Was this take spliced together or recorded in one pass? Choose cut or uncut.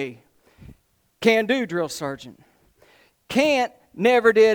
uncut